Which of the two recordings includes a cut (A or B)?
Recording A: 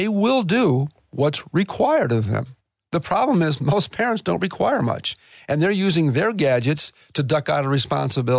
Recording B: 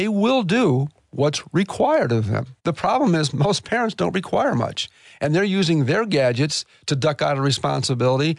B